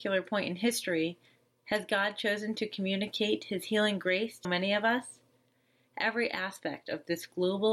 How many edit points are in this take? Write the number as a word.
one